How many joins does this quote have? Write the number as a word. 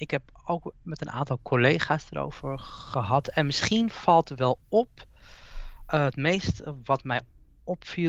zero